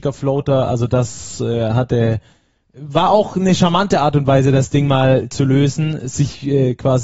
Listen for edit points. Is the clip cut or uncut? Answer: uncut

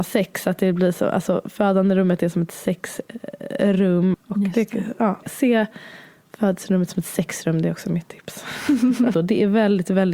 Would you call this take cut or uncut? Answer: cut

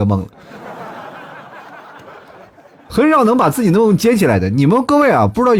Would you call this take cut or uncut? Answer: uncut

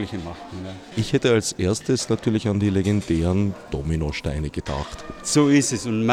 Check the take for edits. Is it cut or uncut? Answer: cut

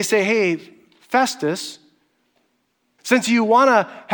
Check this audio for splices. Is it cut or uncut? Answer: cut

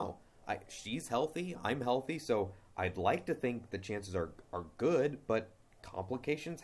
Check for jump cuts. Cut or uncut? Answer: uncut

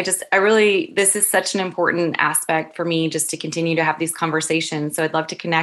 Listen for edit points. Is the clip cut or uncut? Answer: uncut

